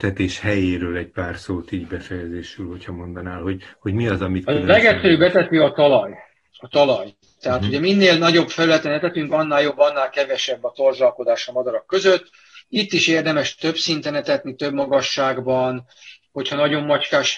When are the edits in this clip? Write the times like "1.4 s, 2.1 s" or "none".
none